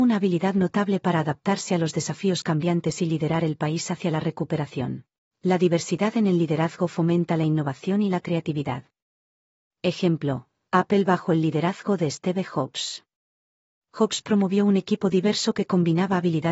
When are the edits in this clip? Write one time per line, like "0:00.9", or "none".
0:05.3